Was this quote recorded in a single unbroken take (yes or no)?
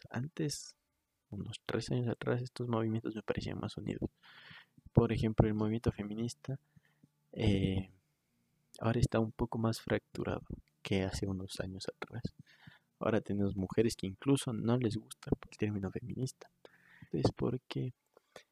no